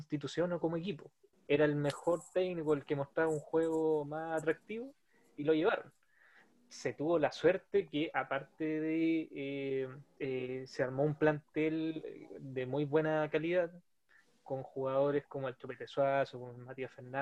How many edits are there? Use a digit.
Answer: 2